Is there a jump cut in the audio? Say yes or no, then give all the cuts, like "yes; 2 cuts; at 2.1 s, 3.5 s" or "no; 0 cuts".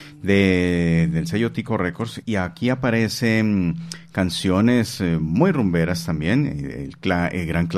no; 0 cuts